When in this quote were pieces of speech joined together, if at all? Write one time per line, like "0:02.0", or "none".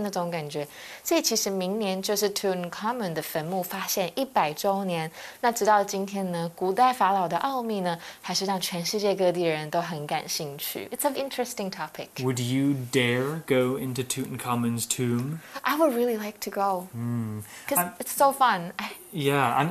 0:11.1